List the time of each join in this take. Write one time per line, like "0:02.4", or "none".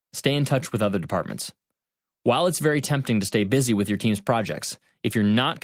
none